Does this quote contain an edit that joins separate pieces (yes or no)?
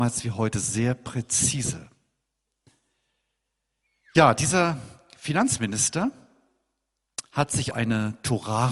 yes